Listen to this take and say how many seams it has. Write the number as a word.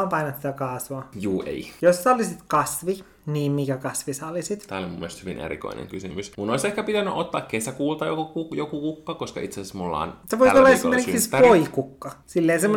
two